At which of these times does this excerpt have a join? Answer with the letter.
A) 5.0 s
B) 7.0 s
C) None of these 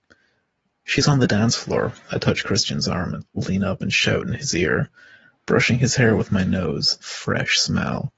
B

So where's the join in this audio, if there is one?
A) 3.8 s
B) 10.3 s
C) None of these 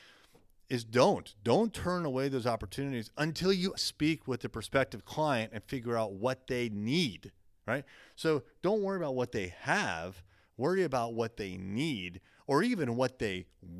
A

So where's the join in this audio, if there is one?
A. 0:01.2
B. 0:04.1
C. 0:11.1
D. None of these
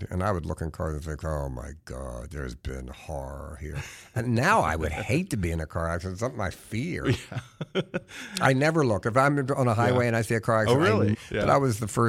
C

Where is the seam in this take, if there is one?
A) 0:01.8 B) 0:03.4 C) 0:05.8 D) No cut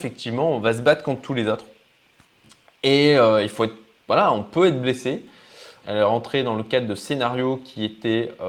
C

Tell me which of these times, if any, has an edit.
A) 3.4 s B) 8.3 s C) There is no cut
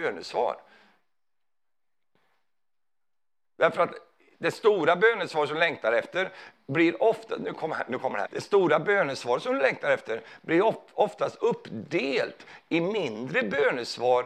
B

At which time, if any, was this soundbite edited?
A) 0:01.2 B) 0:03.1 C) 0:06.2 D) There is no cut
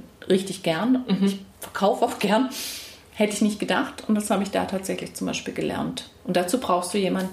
D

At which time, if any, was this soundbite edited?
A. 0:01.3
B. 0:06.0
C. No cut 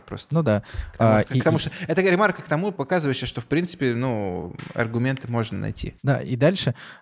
B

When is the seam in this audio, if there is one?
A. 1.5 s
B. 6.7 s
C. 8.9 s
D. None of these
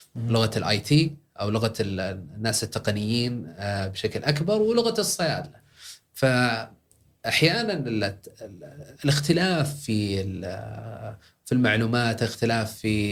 C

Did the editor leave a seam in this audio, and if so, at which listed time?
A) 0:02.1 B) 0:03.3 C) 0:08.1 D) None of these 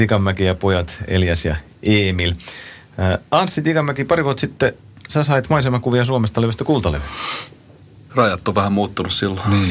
C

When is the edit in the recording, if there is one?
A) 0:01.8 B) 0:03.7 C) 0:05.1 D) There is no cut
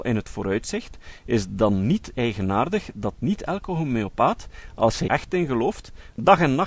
C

